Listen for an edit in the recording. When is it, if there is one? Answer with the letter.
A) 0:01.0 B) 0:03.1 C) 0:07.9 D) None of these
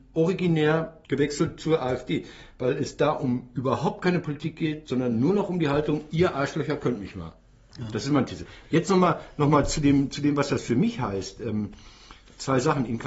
A